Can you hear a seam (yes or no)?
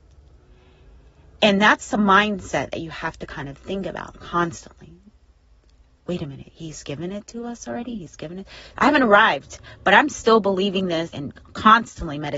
yes